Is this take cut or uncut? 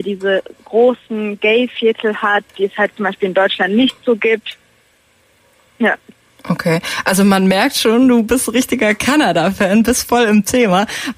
uncut